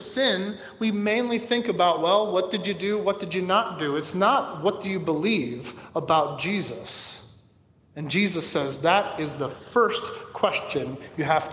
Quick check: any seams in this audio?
no; 0 cuts

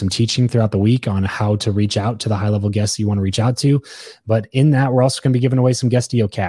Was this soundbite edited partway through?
no; 0 cuts

